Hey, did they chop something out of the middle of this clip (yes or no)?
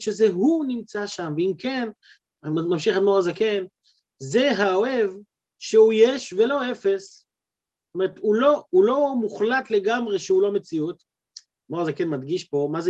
no